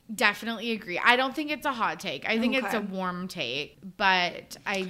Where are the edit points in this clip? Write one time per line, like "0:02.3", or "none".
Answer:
none

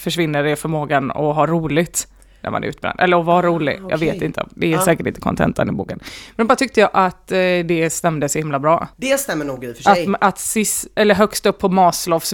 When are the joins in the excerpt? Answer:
0:08.9

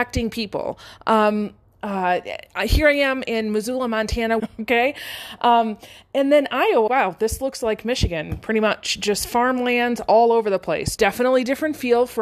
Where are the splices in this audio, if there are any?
0:04.4
0:06.9
0:11.0

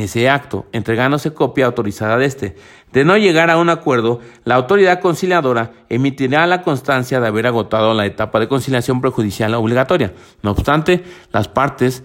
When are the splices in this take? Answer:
none

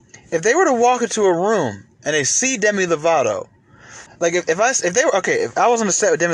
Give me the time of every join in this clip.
0:04.1

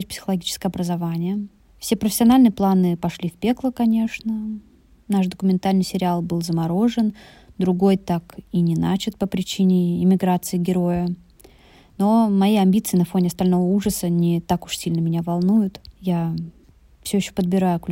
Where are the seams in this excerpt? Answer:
0:15.9

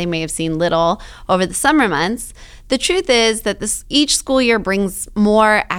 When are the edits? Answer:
none

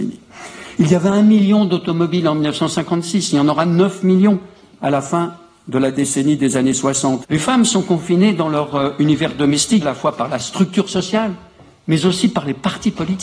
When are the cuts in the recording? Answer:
0:07.2
0:09.8

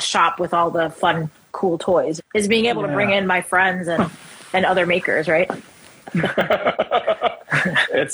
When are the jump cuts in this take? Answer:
0:02.2

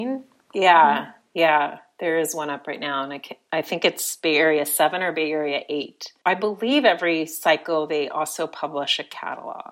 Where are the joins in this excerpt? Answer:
none

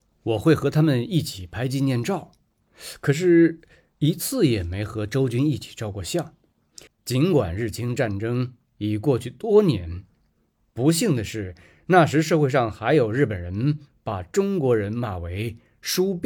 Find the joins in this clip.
0:06.9

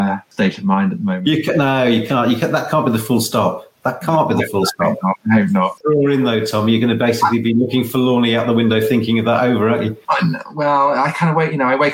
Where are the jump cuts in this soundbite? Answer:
0:05.8

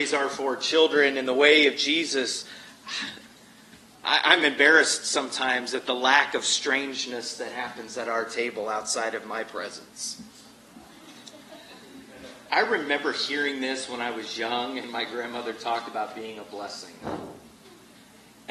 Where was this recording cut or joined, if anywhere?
none

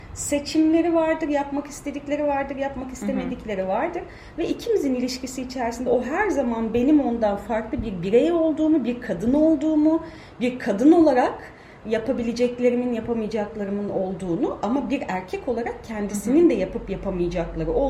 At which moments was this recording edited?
0:04.3

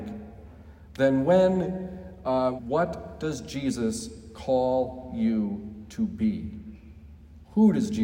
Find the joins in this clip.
0:02.6

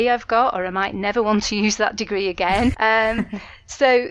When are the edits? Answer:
0:02.7

